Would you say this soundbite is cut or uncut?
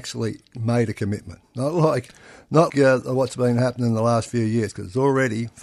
cut